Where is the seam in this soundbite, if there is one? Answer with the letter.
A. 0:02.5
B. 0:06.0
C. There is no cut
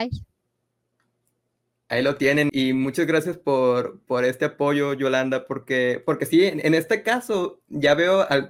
A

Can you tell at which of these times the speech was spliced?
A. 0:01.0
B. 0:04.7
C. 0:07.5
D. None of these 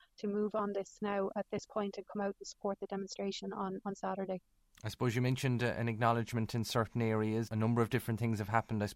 C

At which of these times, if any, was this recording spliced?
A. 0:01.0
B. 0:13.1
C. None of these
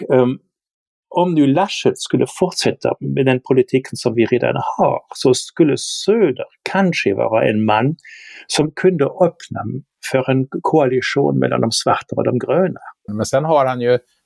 B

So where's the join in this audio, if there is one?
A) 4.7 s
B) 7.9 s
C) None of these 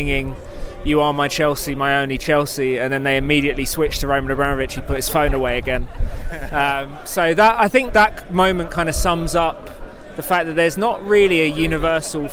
B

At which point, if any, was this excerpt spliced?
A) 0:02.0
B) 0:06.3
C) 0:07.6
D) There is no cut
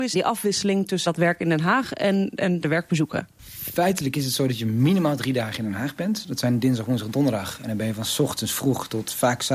D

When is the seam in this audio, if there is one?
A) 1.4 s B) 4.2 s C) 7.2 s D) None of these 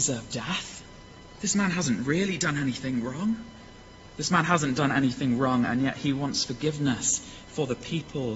B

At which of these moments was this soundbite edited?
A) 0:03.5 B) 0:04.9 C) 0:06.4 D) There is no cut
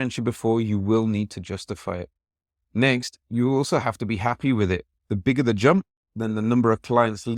B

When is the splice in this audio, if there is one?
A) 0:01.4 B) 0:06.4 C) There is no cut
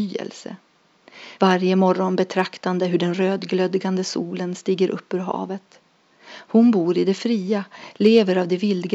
A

